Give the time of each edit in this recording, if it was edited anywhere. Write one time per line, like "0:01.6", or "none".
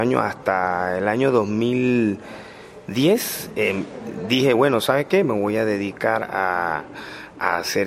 none